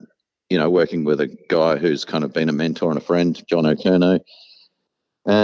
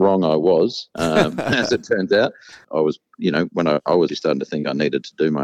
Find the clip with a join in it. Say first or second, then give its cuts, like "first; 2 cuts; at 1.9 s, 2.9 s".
second; 2 cuts; at 2.6 s, 4.1 s